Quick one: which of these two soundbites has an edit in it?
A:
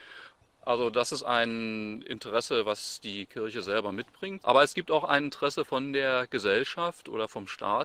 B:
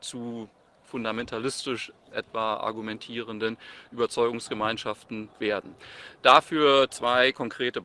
A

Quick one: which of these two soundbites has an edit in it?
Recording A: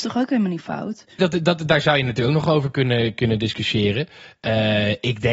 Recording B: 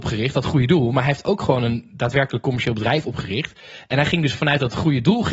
A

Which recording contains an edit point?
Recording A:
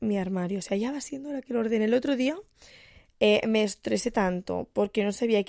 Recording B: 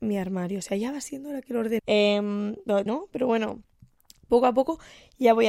B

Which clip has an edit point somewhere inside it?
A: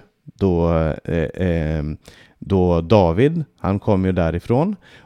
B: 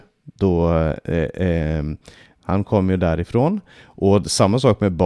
B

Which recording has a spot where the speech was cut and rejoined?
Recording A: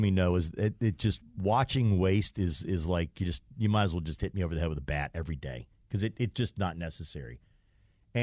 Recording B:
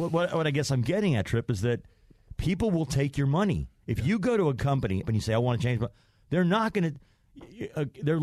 B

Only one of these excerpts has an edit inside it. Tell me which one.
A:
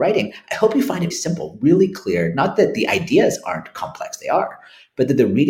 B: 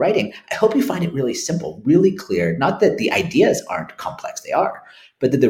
A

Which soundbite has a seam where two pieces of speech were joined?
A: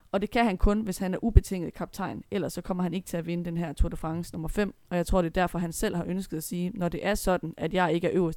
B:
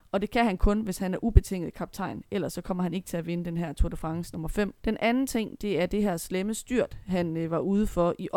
B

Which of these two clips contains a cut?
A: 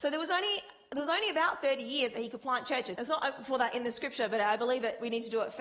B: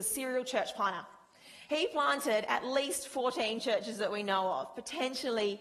A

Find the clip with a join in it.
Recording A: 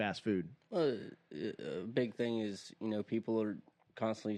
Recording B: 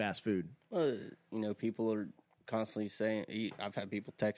B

